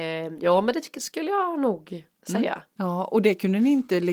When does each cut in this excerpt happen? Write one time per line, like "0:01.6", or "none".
0:02.8